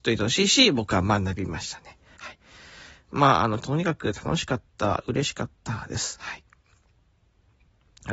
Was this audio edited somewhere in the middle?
yes; 1 cut; at 3.6 s

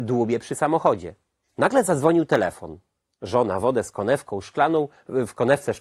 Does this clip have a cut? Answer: no; 0 cuts

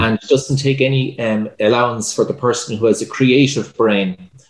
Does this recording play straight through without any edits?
no; 1 cut; at 1.5 s

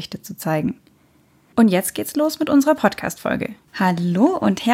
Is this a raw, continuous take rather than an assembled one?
no; 2 cuts; at 1.5 s, 3.7 s

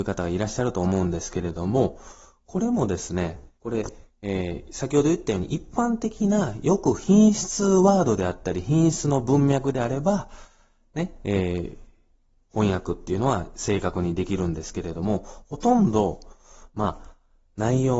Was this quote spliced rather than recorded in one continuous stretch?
yes; 1 cut; at 3.6 s

